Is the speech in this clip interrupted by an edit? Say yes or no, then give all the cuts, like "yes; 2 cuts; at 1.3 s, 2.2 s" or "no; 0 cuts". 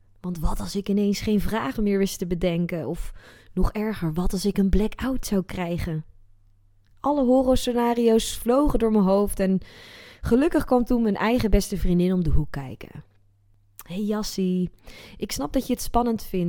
no; 0 cuts